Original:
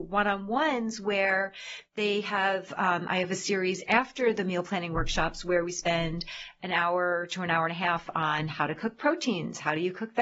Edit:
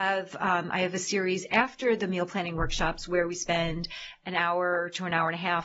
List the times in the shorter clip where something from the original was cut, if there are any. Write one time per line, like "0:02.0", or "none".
none